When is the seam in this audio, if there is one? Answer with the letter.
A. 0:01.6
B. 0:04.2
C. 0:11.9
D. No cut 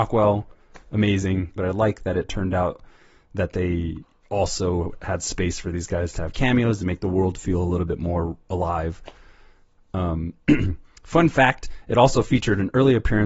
A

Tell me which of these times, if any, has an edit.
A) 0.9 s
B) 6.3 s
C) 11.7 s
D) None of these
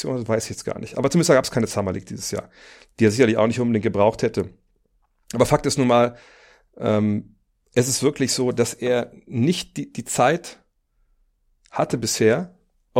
D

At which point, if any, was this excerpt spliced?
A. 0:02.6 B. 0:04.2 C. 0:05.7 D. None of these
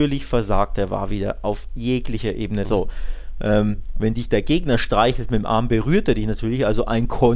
A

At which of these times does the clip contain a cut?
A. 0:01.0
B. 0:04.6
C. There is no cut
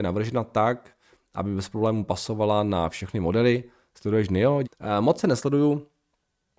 B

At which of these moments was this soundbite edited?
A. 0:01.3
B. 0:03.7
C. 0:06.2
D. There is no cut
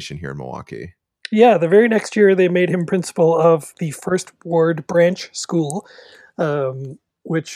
B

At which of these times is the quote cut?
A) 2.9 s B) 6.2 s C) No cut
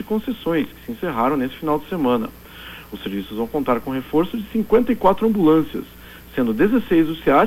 C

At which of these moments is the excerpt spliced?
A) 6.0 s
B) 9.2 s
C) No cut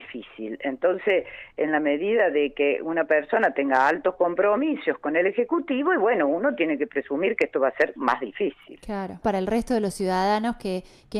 B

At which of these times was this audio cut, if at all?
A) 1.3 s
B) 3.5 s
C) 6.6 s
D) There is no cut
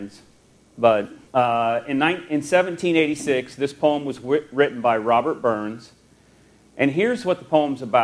A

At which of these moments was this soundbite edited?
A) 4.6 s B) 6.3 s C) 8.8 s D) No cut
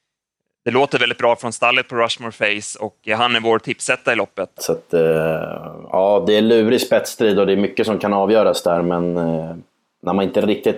A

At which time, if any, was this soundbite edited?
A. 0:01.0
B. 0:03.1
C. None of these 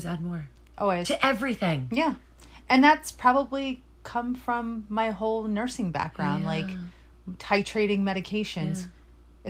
C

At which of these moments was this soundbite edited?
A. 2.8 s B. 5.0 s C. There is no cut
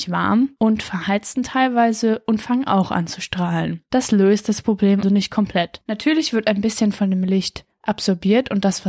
B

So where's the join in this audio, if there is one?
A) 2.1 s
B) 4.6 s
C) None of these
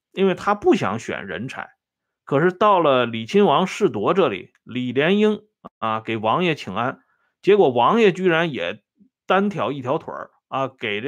A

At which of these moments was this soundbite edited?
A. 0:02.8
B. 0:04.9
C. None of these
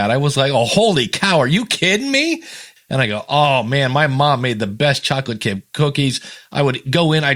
A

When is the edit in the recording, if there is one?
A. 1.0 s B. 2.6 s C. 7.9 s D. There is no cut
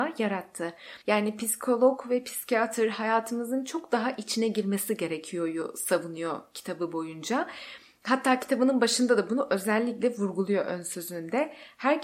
A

